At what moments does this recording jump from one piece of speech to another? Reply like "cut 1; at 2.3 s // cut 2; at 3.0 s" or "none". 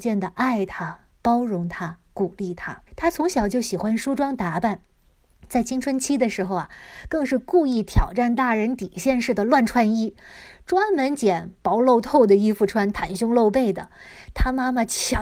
cut 1; at 2.9 s